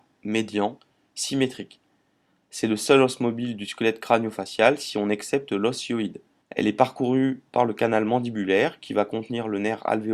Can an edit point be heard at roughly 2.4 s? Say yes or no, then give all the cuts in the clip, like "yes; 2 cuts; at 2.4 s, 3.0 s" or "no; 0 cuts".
no; 1 cut; at 6.4 s